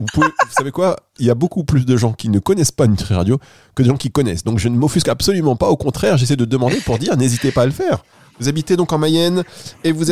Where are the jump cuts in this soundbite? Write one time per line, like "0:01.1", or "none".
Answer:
none